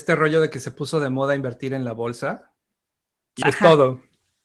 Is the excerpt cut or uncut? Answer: cut